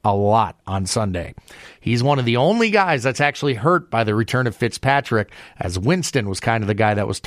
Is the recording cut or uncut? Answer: cut